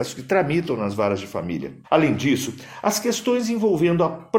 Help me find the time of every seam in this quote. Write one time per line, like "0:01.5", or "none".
0:01.8

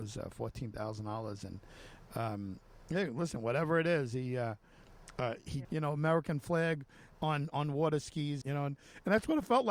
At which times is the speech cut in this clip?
0:05.6
0:08.4

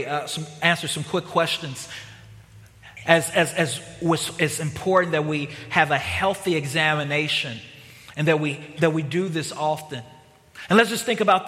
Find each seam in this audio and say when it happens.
0:08.8

